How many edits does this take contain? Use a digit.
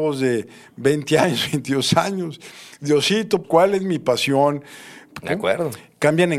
2